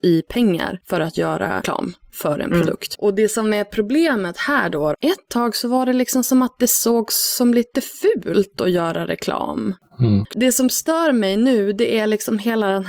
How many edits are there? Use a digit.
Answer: 2